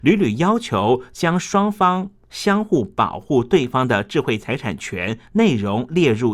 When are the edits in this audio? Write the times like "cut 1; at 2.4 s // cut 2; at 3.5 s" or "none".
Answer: none